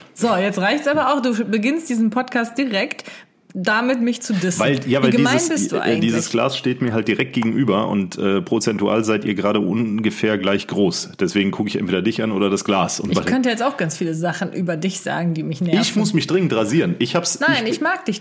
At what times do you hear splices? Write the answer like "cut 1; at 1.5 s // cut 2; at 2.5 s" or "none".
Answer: none